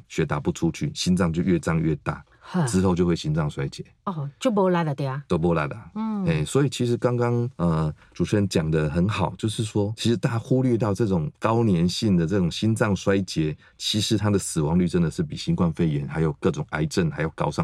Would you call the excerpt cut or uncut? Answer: uncut